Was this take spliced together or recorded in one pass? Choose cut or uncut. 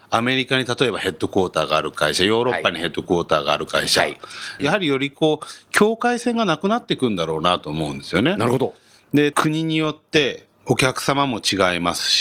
cut